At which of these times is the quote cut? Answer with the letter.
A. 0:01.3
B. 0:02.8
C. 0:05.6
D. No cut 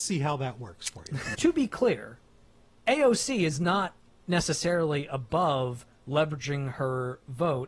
A